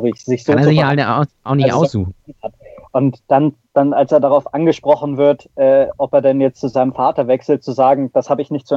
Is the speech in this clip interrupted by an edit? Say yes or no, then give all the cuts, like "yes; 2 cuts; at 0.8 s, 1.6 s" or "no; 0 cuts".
no; 0 cuts